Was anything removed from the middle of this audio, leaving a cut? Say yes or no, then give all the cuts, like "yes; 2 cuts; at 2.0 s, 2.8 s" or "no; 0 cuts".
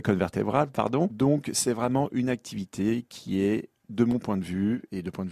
yes; 2 cuts; at 1.1 s, 3.8 s